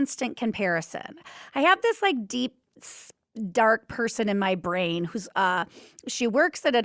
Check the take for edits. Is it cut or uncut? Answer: uncut